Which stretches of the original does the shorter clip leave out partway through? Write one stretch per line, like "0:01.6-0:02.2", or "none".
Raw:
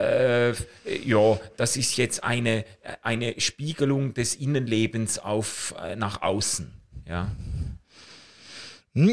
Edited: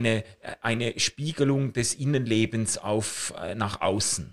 none

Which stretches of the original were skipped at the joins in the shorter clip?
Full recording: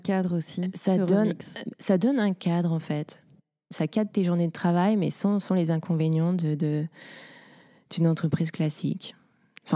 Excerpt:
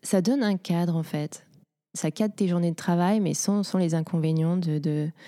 none

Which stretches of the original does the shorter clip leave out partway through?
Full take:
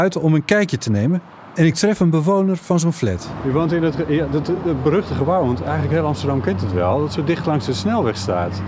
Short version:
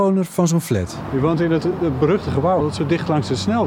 0:03.9-0:04.4
0:05.4-0:07.0

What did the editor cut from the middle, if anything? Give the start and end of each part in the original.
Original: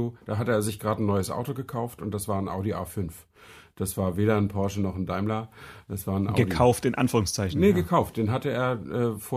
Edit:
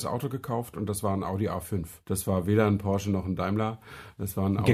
0:03.3-0:03.7

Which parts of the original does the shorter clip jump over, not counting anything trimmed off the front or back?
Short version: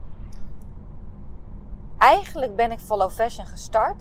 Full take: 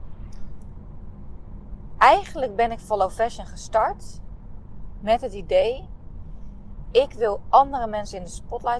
none

